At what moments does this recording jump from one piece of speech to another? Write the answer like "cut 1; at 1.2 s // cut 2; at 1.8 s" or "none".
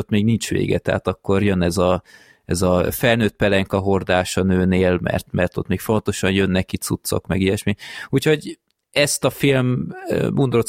none